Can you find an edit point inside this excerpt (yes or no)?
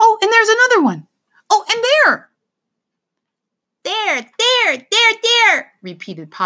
no